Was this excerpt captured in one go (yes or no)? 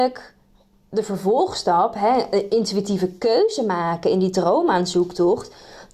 yes